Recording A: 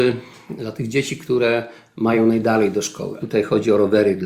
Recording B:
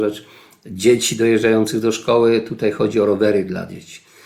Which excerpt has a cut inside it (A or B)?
A